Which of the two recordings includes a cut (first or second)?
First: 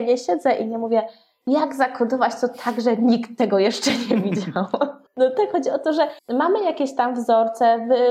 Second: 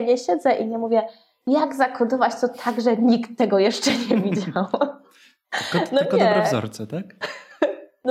first